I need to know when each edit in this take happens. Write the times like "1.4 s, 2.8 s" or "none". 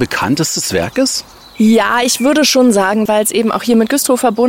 3.1 s